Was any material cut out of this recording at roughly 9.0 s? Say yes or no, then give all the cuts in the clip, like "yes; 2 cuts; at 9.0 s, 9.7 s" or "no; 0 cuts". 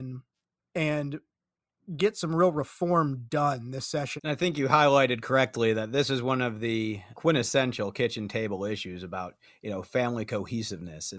no; 2 cuts; at 4.2 s, 7.1 s